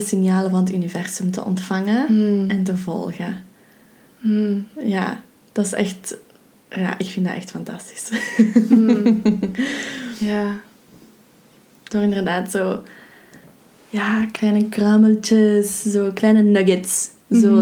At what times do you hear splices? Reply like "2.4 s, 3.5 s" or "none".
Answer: 11.9 s